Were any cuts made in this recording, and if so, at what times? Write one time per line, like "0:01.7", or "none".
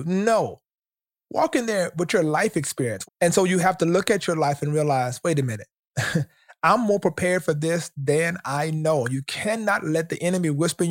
0:03.0